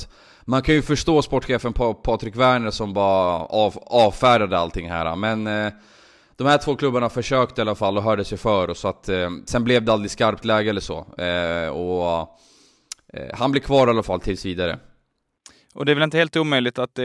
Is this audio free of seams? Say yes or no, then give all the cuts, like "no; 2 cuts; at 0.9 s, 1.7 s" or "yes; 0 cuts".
yes; 0 cuts